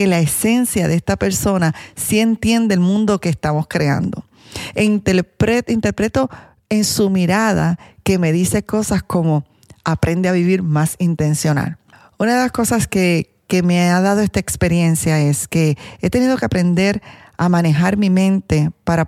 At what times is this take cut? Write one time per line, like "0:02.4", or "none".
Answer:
none